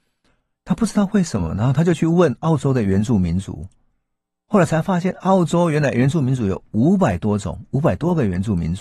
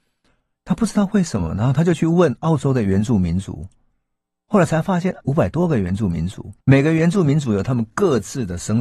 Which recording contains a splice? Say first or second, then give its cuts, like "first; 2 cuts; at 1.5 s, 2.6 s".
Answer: second; 2 cuts; at 5.2 s, 6.6 s